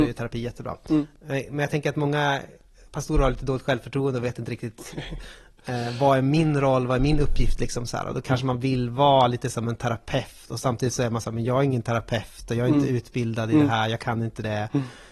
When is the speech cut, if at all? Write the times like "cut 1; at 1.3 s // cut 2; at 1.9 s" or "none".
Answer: none